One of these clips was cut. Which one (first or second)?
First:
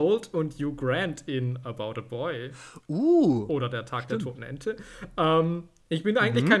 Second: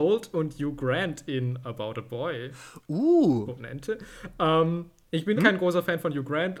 second